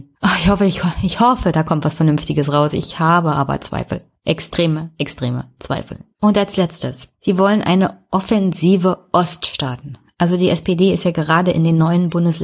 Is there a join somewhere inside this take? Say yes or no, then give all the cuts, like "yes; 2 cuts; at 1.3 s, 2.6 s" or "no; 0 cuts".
no; 0 cuts